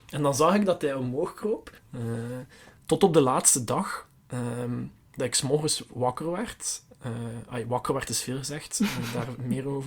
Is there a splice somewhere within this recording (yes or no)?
yes